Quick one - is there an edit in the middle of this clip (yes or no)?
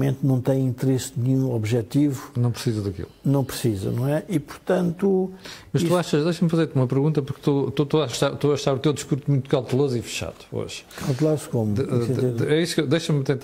no